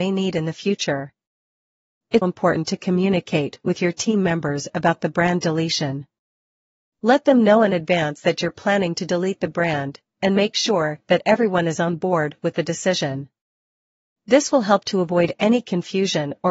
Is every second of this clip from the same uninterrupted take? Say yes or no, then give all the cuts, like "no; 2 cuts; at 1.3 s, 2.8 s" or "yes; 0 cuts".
no; 1 cut; at 2.2 s